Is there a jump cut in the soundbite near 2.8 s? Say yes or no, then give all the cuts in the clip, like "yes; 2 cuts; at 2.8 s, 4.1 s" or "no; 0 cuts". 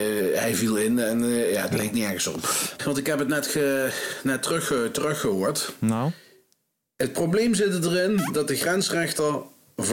yes; 1 cut; at 2.8 s